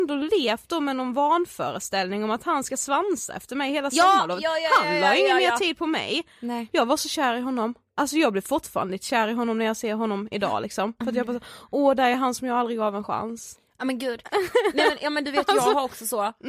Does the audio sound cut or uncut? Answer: uncut